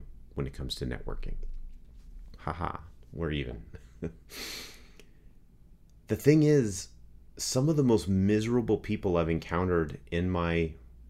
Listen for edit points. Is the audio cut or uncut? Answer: cut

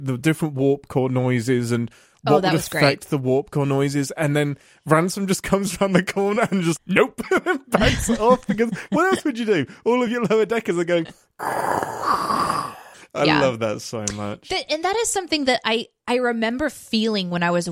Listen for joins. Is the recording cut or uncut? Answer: cut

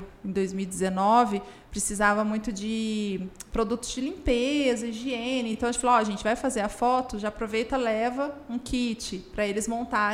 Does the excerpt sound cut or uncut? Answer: uncut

